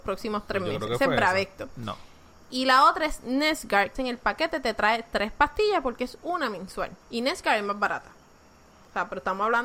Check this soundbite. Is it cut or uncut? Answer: cut